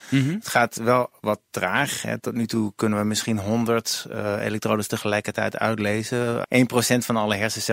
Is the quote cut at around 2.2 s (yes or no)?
no